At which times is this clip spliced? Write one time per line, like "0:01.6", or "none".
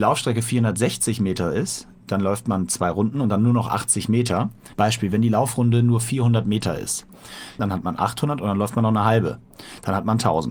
0:04.7
0:07.6